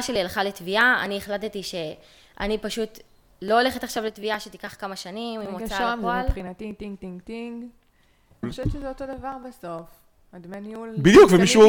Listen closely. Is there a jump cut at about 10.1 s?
no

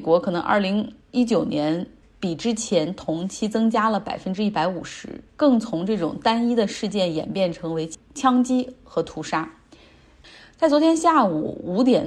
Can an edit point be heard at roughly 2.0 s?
yes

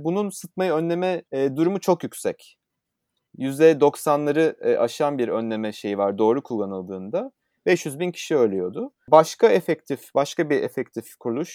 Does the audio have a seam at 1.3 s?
yes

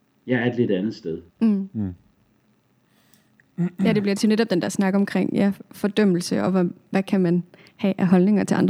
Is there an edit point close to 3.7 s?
no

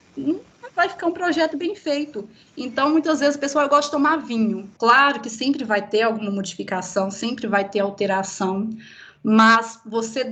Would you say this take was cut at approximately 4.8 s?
yes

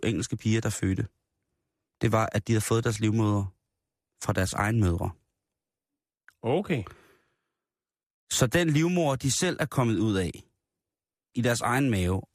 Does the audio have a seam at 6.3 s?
no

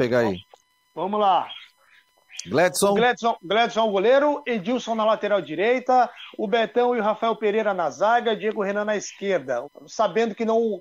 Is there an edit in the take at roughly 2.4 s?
no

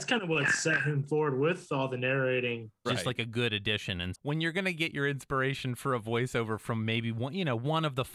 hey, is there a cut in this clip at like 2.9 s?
yes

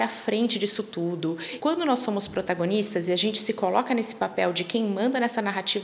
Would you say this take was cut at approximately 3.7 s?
no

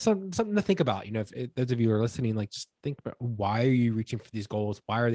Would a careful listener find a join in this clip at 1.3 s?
no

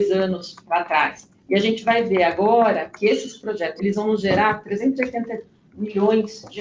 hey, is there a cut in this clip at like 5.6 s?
no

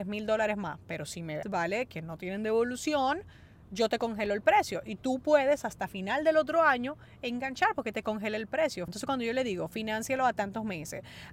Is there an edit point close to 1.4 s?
yes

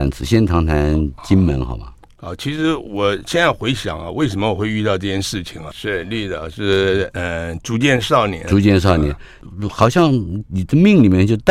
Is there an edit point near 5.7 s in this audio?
yes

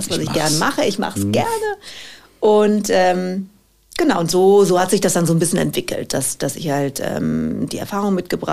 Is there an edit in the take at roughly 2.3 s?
no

